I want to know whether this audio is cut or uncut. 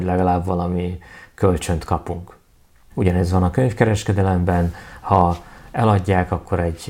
cut